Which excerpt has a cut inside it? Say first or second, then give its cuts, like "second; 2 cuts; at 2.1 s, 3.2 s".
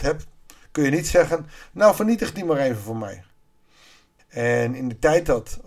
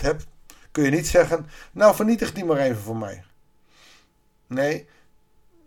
first; 1 cut; at 4.2 s